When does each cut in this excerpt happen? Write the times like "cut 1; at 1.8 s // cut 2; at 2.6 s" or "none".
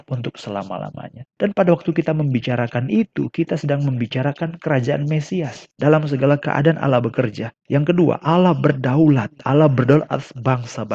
cut 1; at 5.8 s